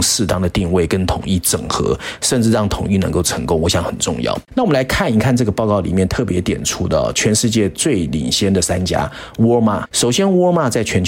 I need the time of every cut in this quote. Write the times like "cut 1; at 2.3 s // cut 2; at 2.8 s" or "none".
cut 1; at 4.5 s // cut 2; at 9.9 s

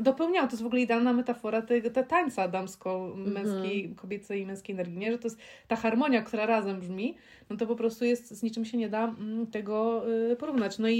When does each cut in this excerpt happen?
none

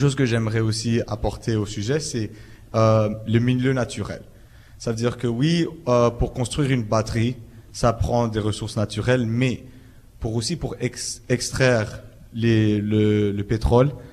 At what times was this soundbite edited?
none

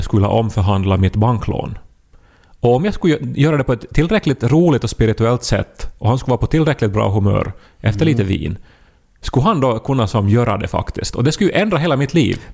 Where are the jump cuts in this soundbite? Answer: none

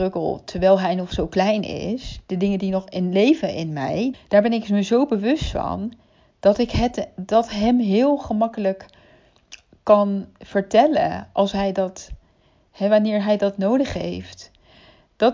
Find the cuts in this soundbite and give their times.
cut 1; at 4.1 s

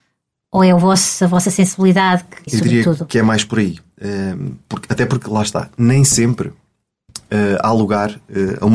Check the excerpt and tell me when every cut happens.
cut 1; at 2.5 s

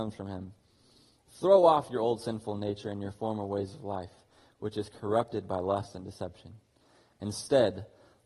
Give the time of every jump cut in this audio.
none

